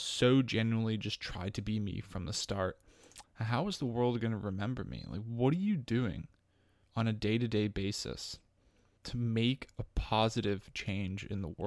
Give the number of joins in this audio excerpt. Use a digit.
1